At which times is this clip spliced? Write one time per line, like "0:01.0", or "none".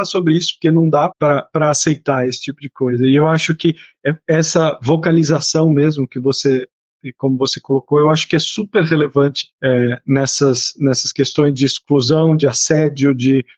0:01.1
0:09.5